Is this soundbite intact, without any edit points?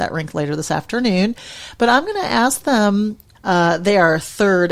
no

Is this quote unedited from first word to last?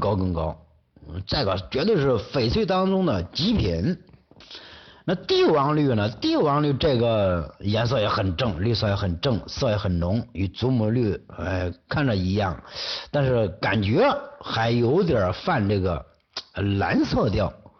yes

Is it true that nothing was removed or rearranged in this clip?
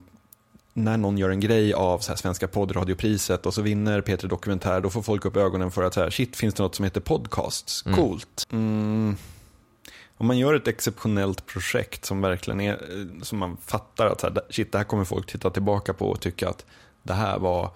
no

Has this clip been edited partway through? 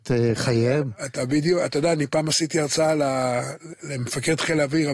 no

